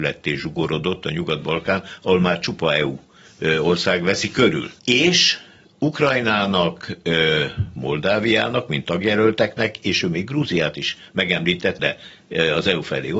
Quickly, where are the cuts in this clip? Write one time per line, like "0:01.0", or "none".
0:04.8
0:11.8